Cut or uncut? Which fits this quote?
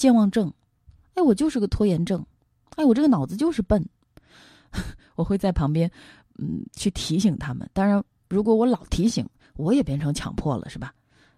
uncut